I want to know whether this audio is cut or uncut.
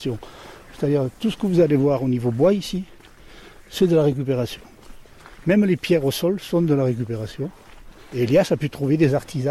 uncut